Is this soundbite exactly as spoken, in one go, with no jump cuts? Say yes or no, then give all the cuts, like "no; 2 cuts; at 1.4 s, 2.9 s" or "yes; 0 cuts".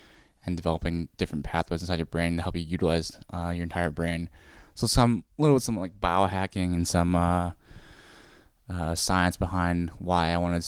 yes; 0 cuts